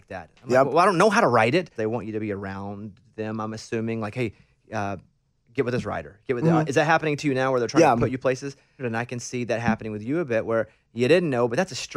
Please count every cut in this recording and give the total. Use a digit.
2